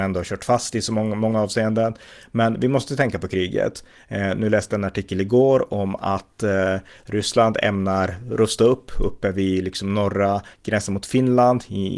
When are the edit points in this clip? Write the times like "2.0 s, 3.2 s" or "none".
none